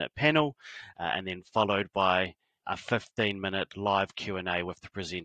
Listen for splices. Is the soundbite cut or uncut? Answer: cut